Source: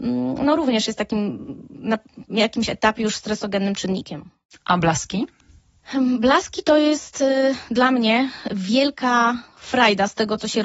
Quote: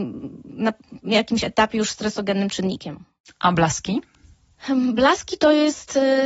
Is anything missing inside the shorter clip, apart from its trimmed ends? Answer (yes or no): no